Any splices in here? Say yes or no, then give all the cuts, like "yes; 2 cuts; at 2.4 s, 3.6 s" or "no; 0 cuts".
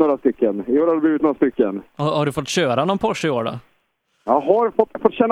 no; 0 cuts